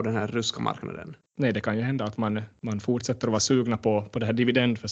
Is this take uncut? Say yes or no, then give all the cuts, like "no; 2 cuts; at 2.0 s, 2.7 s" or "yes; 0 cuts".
no; 1 cut; at 1.2 s